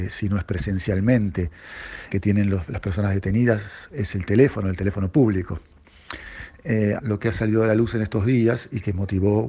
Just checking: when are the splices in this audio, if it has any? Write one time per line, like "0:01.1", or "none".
0:02.1
0:07.0